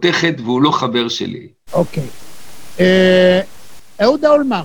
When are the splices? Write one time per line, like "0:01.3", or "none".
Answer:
0:01.7